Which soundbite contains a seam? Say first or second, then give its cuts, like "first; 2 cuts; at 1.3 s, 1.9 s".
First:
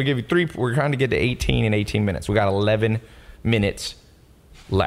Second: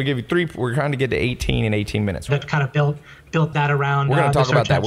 second; 2 cuts; at 2.3 s, 3.5 s